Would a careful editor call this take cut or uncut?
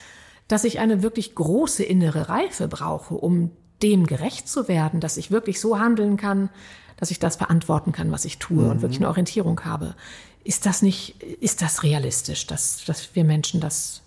cut